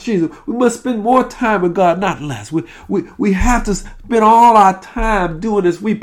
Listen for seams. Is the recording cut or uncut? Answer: uncut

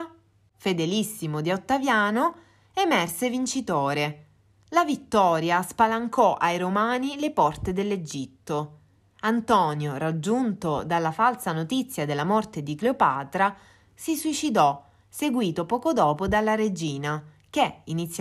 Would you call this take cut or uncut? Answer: uncut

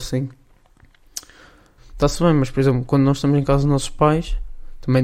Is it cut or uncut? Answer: cut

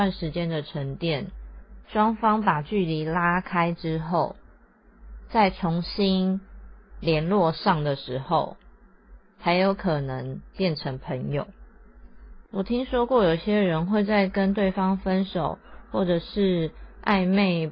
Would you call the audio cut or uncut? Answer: cut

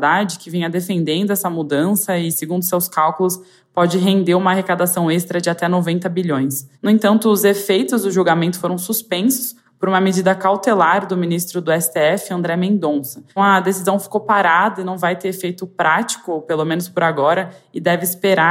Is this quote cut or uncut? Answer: cut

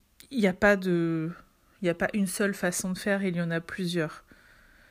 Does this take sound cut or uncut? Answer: uncut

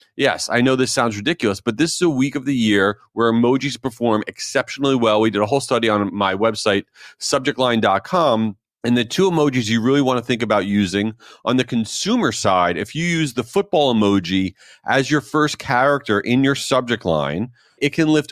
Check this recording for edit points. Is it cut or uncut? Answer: uncut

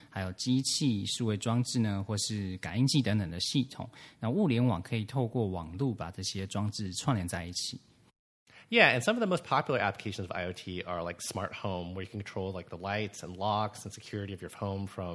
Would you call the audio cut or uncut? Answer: uncut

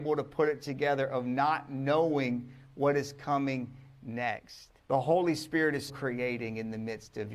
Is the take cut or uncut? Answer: cut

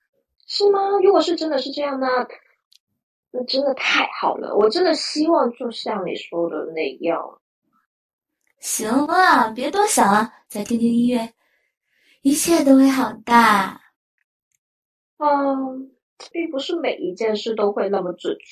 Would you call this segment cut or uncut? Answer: cut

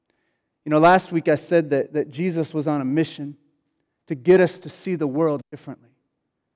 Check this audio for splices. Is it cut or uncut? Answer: uncut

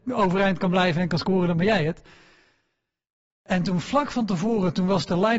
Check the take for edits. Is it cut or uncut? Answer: uncut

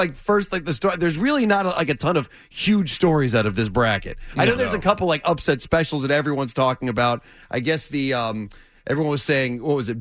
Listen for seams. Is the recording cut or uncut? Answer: uncut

